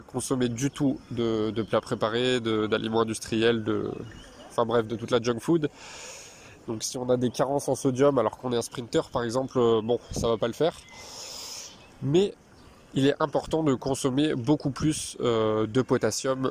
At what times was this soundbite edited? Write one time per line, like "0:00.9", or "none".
0:06.6